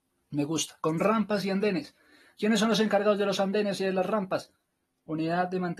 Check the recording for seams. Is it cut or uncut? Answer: uncut